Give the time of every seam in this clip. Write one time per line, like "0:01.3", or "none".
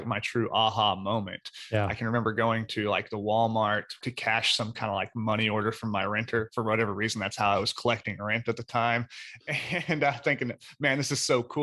0:04.0

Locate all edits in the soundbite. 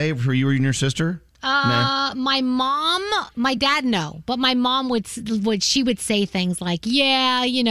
none

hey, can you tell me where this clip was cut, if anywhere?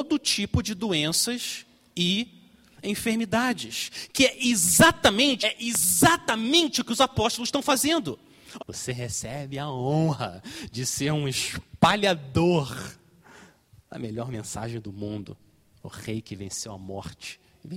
0:05.4
0:08.6

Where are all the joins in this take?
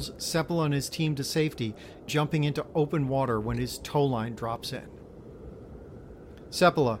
0:02.1

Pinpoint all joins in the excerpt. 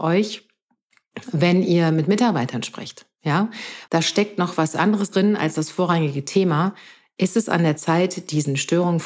0:03.9

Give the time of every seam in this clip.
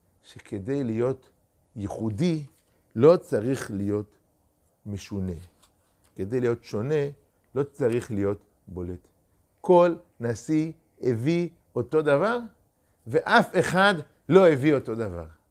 none

